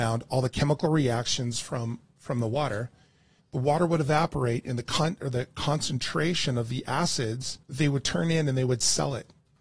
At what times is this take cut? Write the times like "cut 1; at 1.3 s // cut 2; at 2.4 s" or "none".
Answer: cut 1; at 3.4 s // cut 2; at 7.6 s